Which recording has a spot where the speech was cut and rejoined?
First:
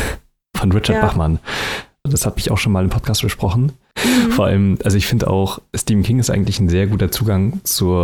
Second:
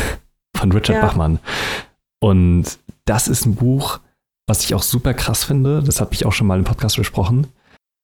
first; 2 cuts; at 2.1 s, 3.9 s

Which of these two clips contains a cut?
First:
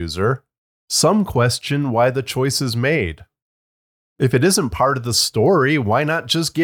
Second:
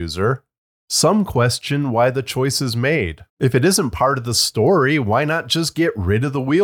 second; 1 cut; at 3.3 s

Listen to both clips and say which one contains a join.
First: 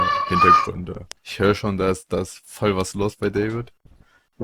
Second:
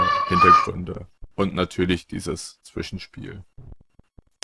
first; 1 cut; at 1.1 s

